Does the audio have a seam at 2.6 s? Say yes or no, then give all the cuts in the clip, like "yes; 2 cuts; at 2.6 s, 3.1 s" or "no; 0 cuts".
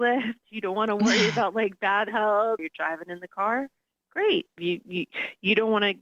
yes; 2 cuts; at 2.6 s, 4.6 s